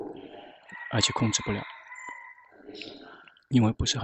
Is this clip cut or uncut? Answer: uncut